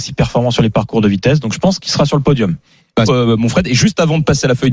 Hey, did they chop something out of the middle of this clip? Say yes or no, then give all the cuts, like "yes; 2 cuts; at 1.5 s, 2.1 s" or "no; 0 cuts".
yes; 1 cut; at 3.1 s